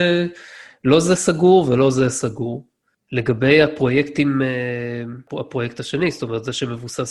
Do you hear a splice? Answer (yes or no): no